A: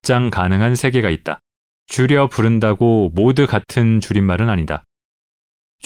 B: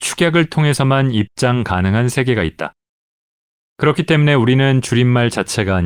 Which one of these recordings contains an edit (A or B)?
A